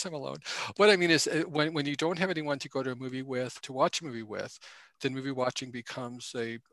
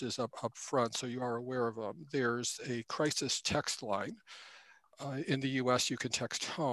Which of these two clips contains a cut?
first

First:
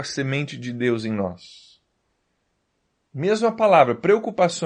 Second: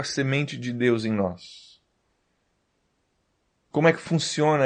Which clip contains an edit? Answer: first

